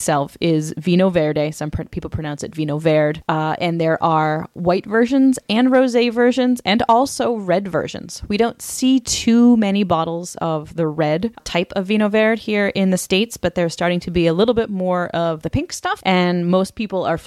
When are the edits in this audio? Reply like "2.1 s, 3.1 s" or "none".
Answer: none

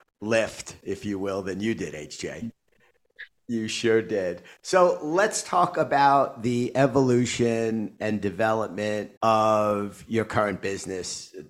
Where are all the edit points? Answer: 3.4 s, 9.2 s

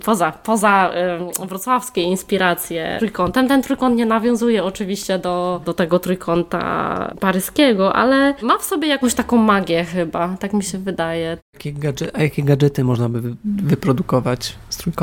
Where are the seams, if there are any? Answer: 5.6 s, 11.4 s

